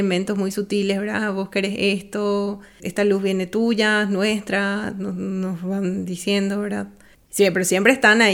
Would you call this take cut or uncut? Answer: cut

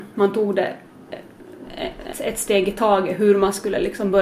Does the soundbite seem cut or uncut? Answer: cut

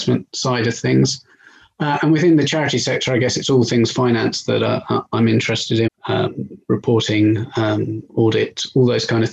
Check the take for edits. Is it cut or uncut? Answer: cut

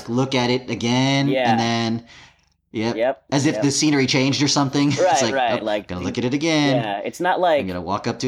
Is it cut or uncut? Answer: uncut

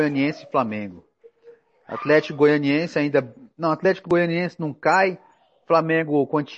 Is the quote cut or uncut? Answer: uncut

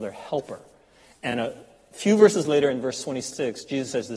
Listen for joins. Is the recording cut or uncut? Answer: uncut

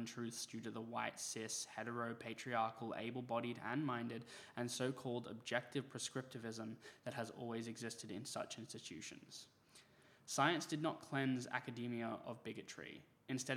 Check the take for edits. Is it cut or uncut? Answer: uncut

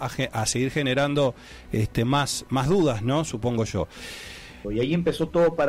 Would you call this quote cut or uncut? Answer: cut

